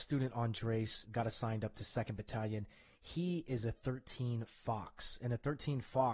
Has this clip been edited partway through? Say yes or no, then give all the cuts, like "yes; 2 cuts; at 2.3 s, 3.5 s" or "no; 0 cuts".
yes; 1 cut; at 1.1 s